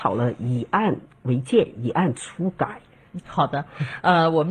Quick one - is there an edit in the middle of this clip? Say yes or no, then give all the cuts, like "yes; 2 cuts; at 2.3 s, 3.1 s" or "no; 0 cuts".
yes; 1 cut; at 3.2 s